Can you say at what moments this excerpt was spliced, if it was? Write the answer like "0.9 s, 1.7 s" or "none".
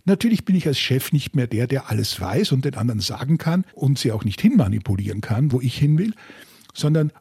3.7 s